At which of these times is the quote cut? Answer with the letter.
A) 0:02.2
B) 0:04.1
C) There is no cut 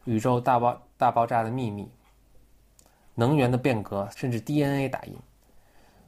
B